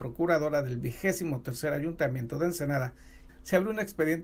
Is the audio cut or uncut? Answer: cut